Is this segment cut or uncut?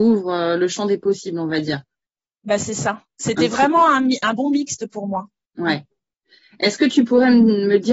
uncut